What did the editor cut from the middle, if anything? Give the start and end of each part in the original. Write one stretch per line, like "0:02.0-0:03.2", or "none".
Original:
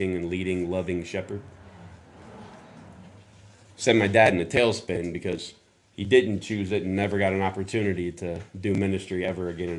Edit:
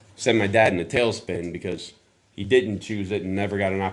none